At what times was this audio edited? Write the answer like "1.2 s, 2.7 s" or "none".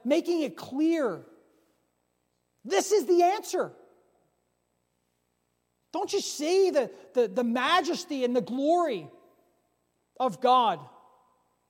5.8 s